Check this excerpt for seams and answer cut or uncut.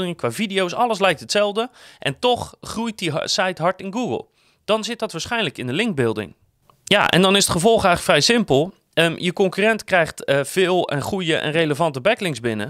uncut